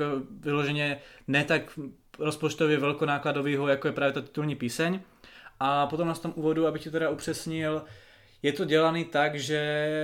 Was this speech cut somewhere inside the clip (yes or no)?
no